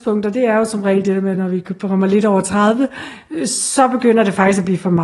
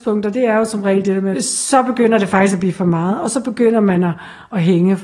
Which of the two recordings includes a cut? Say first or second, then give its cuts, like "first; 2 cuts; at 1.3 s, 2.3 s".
second; 1 cut; at 1.3 s